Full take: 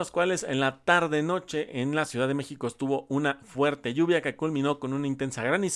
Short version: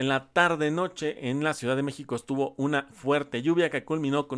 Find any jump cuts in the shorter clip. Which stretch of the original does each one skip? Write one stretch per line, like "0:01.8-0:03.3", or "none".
none

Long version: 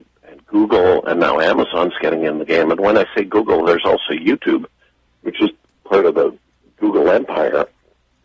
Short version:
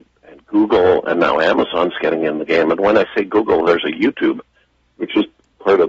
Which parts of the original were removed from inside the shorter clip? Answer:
0:03.8-0:04.1

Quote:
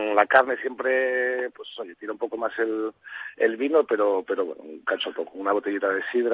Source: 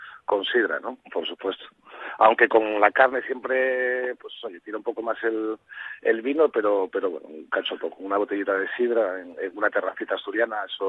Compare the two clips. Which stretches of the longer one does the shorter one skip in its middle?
none

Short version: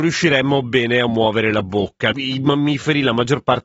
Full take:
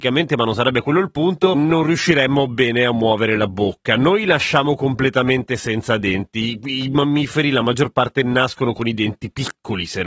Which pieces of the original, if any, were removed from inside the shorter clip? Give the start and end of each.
0:04.0-0:06.6

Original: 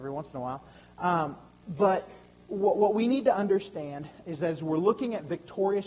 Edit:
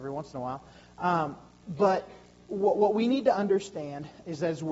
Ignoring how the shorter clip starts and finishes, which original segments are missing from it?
none

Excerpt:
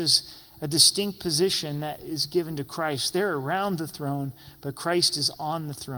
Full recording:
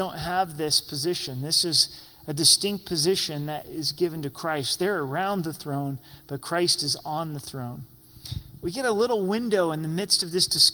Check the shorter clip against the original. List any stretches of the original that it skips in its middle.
none

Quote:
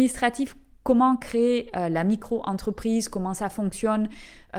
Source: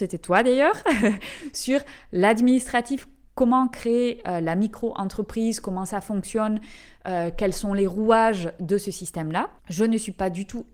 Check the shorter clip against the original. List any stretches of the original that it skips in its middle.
none

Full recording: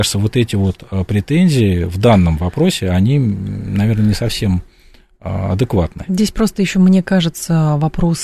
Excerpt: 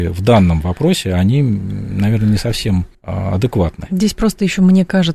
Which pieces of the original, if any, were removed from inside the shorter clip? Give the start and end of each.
0:04.7-0:05.1

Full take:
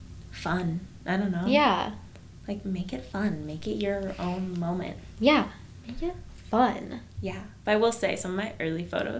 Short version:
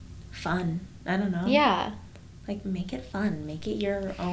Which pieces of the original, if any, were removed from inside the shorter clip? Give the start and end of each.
none

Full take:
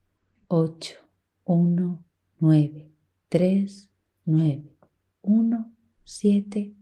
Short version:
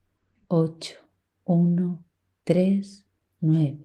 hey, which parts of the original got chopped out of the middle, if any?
0:02.3-0:03.1

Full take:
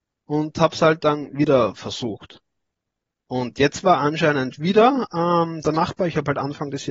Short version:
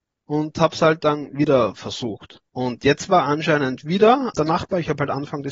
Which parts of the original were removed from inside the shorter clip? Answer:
0:02.5-0:03.2
0:05.1-0:05.6

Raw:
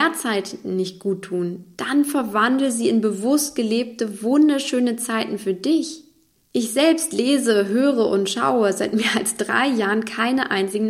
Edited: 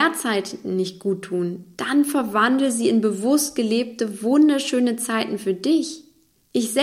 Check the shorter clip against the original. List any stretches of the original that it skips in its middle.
none

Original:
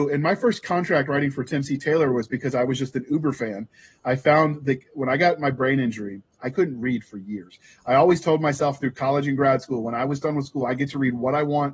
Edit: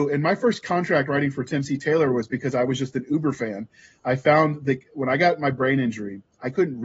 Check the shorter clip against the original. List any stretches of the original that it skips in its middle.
none

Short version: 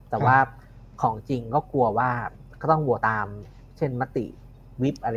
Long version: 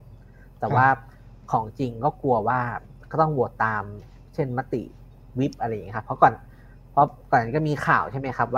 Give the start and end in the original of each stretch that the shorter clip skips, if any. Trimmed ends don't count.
0:03.5-0:03.6

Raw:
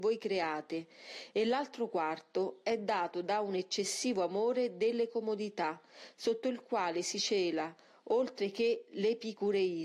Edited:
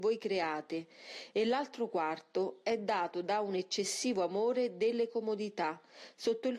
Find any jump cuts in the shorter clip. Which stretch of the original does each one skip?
none

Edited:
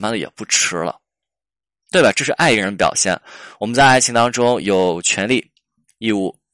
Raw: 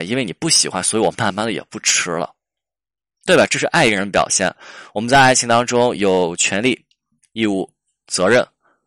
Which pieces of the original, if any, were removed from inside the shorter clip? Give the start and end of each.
none

